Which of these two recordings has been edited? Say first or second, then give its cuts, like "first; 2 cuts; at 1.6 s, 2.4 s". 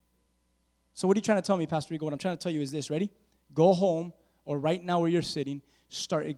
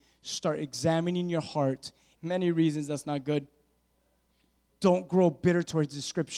second; 2 cuts; at 2.2 s, 4.7 s